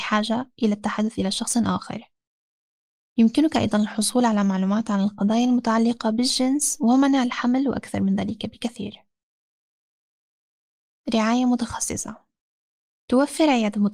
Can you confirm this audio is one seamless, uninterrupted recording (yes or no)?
yes